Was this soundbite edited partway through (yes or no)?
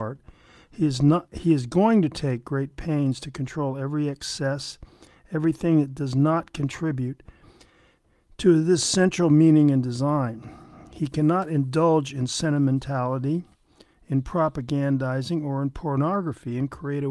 no